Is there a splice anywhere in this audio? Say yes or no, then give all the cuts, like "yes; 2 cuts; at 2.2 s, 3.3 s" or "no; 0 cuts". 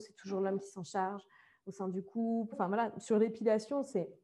yes; 1 cut; at 2.5 s